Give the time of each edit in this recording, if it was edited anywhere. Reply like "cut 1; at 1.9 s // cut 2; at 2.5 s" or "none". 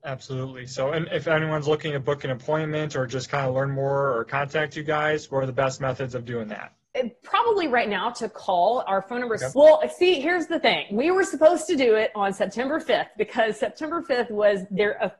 cut 1; at 6.8 s // cut 2; at 9.5 s